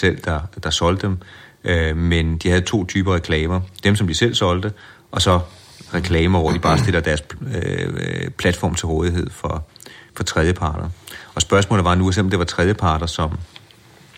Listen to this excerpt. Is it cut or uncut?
uncut